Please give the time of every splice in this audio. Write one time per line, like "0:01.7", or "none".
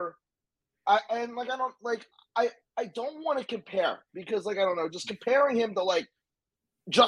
none